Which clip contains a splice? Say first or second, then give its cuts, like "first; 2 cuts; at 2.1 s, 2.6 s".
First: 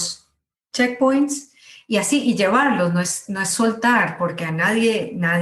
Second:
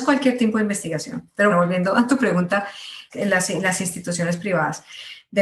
second; 2 cuts; at 1.5 s, 3.1 s